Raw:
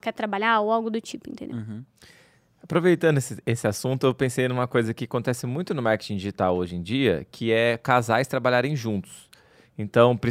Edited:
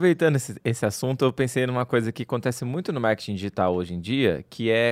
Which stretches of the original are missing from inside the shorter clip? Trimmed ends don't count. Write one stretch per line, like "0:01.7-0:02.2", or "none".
none